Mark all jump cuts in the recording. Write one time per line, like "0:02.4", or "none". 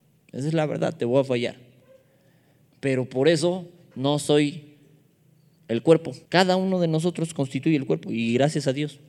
0:06.3